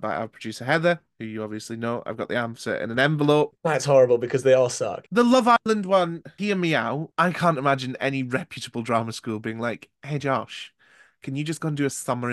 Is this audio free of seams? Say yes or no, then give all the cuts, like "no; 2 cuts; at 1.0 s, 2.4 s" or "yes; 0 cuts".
no; 1 cut; at 3.6 s